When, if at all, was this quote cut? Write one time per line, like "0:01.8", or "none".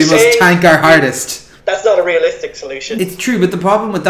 0:01.6
0:03.0